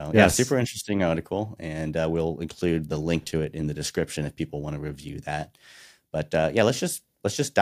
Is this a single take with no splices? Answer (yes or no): yes